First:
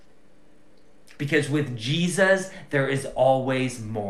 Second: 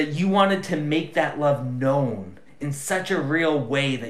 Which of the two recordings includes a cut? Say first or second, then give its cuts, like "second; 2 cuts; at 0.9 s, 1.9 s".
first; 1 cut; at 1.2 s